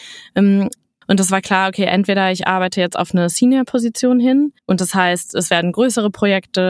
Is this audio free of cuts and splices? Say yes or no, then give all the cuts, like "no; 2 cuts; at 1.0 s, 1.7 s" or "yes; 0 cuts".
no; 2 cuts; at 1.0 s, 4.6 s